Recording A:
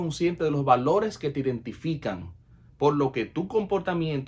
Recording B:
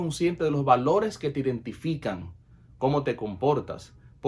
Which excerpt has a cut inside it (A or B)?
A